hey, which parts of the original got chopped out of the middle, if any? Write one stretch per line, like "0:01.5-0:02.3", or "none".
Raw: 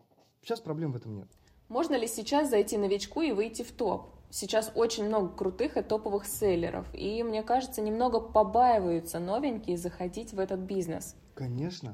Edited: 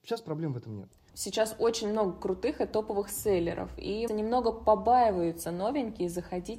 0:01.5-0:04.3
0:07.2-0:07.8